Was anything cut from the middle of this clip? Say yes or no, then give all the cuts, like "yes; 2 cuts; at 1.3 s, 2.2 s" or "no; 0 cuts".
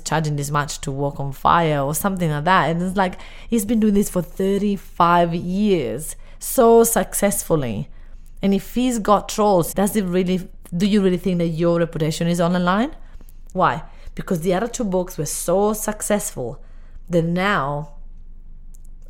yes; 2 cuts; at 9.7 s, 13.5 s